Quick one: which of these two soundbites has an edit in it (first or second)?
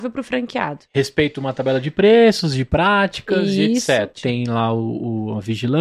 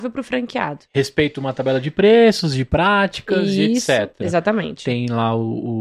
first